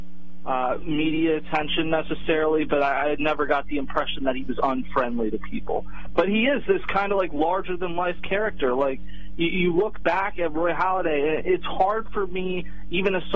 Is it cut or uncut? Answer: uncut